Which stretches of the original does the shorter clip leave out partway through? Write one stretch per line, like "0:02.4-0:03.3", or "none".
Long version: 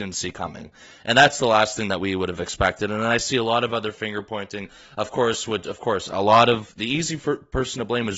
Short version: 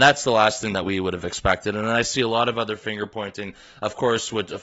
none